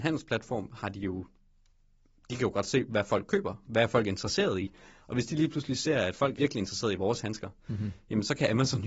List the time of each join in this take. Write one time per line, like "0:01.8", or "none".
0:06.4